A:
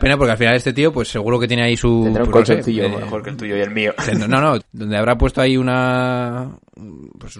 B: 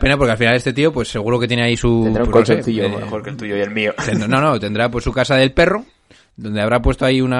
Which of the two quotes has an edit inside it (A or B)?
A